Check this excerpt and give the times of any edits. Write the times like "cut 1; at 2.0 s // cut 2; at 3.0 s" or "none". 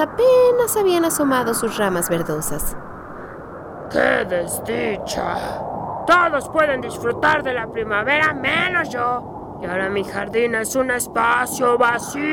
none